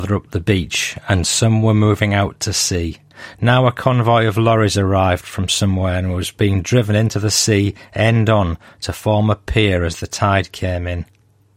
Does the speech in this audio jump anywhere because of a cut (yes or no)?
no